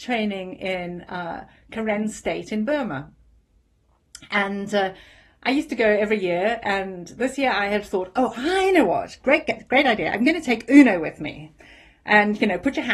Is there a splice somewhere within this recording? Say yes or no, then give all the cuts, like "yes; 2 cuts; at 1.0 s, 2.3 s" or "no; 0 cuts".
no; 0 cuts